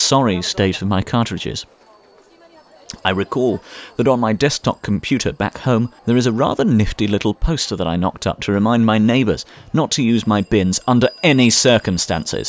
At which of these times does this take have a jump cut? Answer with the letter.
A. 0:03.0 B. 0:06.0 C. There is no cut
B